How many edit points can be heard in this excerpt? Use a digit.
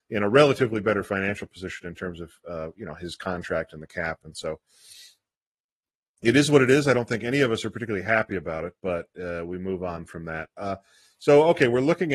0